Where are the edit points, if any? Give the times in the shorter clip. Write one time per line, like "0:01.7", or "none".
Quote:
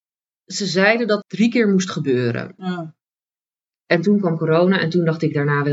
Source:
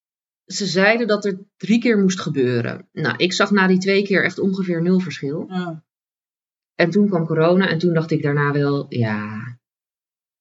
0:01.2
0:02.6

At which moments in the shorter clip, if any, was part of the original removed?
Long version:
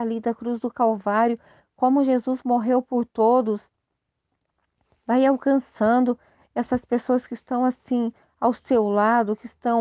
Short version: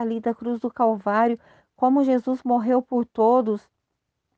none

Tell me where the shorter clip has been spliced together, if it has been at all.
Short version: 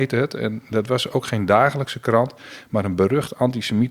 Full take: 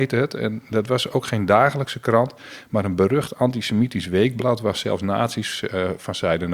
none

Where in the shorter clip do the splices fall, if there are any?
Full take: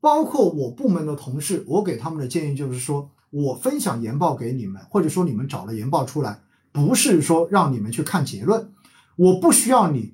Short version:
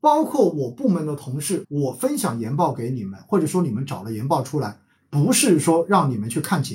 0:01.6

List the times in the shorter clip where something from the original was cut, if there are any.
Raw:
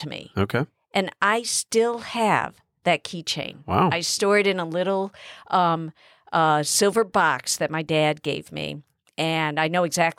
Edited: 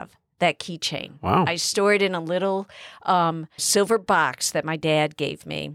0:03.6

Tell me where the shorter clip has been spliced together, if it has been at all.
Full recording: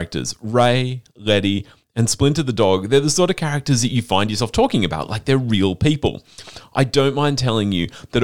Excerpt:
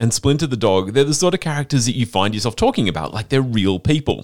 none

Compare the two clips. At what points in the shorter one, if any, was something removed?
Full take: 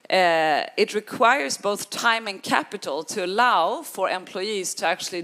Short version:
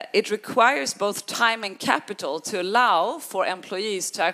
none

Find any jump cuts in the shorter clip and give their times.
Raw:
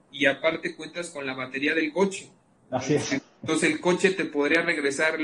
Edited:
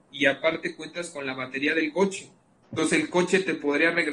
0:02.6

